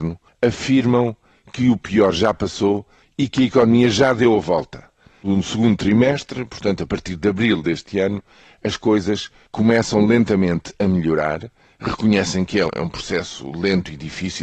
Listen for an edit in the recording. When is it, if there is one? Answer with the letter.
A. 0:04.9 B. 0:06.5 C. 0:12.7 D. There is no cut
C